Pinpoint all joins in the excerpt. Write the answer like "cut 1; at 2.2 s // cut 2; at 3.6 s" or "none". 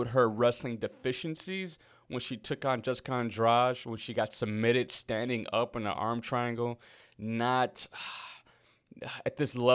none